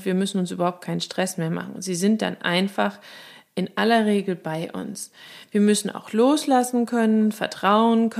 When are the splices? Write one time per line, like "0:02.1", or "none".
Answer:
none